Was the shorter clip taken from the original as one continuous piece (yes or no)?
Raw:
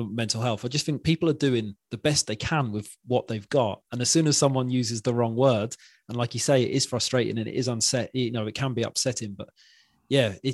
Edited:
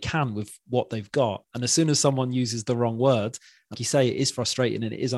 no